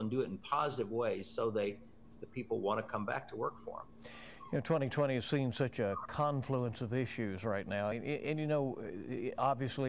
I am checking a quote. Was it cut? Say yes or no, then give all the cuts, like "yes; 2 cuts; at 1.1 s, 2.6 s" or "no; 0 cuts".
no; 0 cuts